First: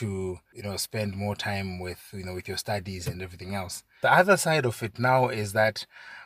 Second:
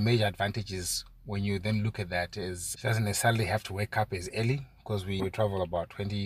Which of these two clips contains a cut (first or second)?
second